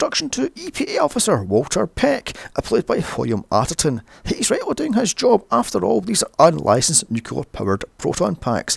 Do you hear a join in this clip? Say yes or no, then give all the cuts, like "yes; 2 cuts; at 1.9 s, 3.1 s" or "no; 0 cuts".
no; 0 cuts